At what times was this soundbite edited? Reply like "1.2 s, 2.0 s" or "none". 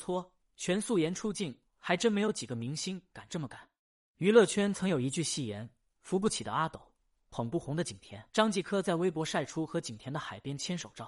4.1 s, 8.3 s